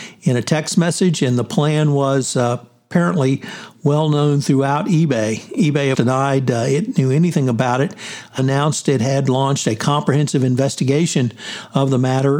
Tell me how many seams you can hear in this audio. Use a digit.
2